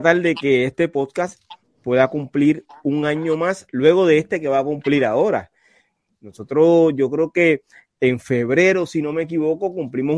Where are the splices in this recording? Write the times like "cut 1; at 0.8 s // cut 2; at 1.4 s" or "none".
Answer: none